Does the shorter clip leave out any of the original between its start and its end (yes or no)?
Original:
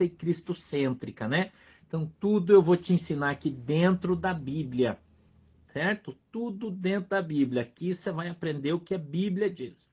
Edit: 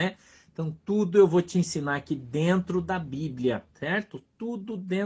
yes